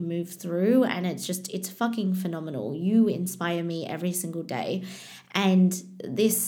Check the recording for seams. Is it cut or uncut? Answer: uncut